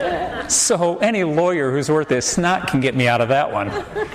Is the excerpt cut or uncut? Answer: uncut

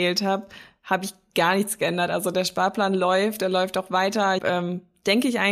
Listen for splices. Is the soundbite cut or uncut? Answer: cut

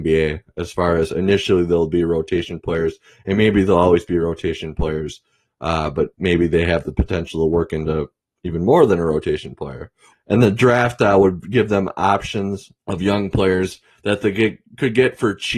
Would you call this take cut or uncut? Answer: cut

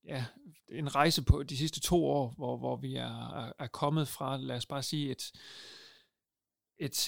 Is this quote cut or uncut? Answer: uncut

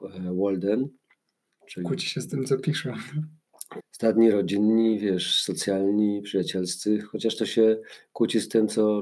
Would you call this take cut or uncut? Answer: cut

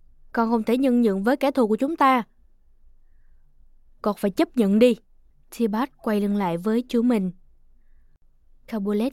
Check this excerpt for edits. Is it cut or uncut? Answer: cut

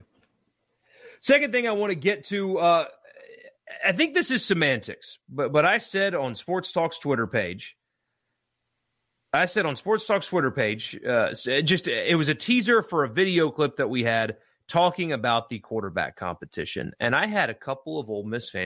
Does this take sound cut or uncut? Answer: uncut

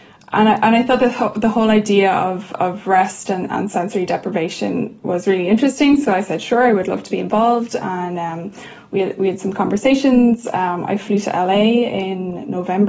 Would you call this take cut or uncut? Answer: uncut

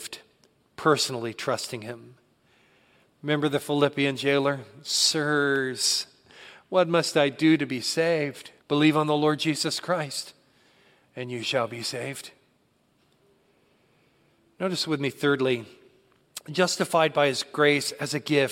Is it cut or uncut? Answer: cut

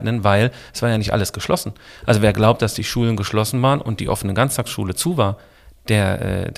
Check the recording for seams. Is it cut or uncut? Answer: uncut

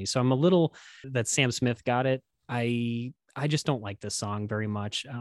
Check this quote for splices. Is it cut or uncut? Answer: cut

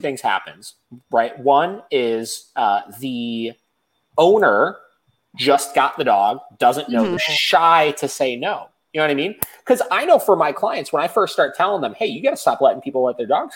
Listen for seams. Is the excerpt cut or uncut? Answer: cut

